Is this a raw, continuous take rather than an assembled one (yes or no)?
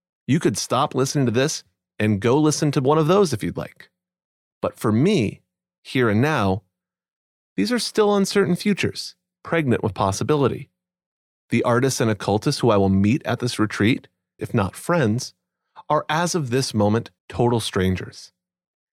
no